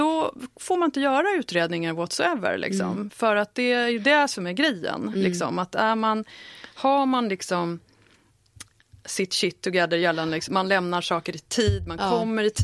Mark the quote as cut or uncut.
cut